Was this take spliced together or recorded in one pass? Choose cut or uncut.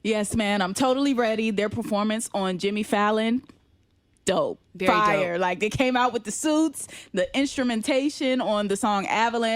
cut